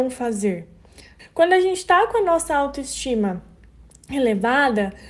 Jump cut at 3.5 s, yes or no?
no